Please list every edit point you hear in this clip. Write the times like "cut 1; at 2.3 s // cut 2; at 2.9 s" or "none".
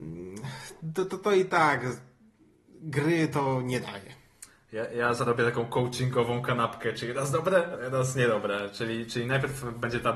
cut 1; at 7.8 s